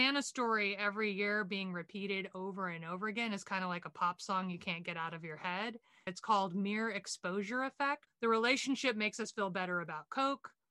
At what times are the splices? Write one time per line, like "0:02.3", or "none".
0:08.1